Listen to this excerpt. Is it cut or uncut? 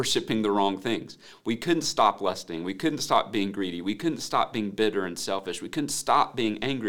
uncut